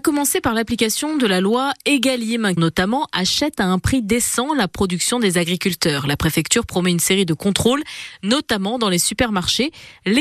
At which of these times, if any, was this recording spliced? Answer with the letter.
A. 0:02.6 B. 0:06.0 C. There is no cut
A